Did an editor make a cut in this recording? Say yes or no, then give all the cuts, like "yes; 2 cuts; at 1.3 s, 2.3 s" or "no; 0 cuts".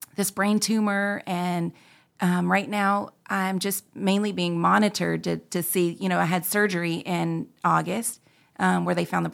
no; 0 cuts